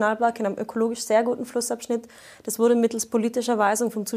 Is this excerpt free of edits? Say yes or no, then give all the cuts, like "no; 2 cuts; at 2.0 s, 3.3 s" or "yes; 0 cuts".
yes; 0 cuts